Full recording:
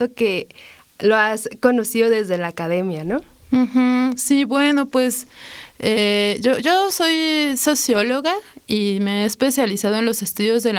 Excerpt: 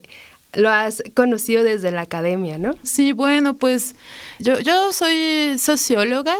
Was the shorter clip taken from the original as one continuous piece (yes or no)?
no